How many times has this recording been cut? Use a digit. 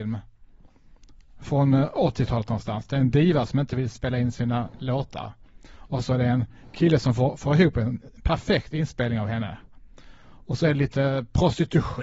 0